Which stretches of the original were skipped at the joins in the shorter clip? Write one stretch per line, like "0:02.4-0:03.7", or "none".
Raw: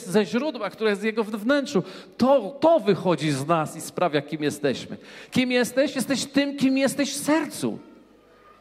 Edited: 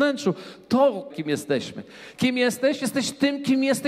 0:02.6-0:04.2